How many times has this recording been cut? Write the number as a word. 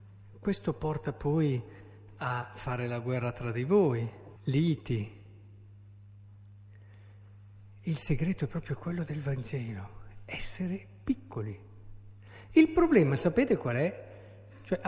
one